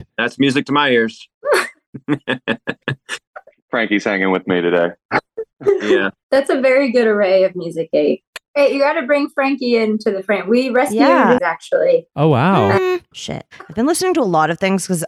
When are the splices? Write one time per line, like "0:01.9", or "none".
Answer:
0:11.4
0:13.1

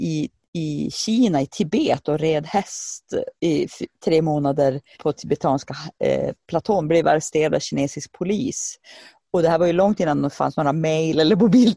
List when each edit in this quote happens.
0:04.9

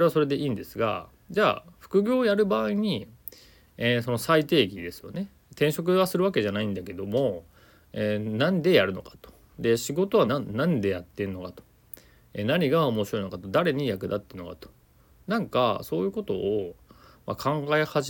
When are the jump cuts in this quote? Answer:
0:10.3

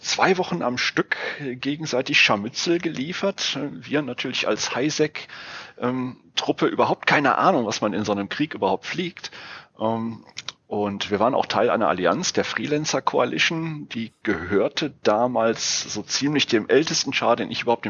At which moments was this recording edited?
none

